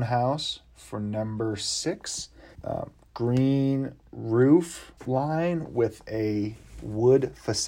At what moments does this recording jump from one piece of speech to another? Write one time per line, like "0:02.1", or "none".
0:02.5
0:05.0